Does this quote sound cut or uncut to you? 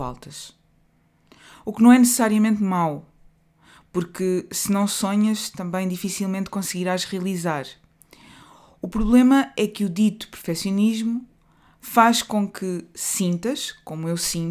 uncut